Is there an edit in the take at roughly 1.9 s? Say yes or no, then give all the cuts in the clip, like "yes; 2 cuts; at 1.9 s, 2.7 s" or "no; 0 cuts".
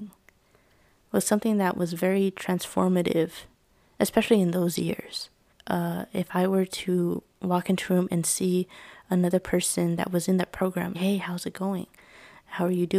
no; 2 cuts; at 5.5 s, 10.9 s